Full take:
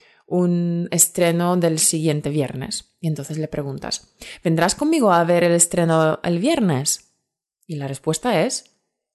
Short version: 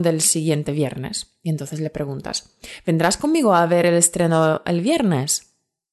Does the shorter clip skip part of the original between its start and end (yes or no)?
no